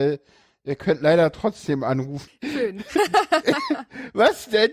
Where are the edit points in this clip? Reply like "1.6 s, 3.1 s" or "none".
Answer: 2.3 s